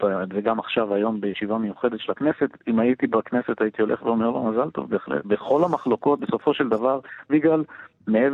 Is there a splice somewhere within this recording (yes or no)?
yes